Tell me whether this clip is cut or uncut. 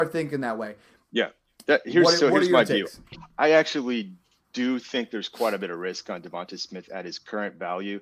uncut